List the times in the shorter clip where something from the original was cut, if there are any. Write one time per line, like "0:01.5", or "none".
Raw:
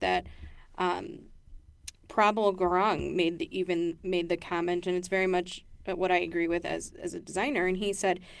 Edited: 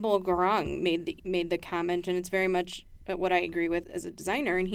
0:01.2
0:03.8